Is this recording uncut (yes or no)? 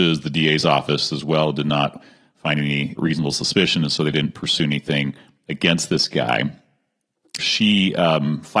no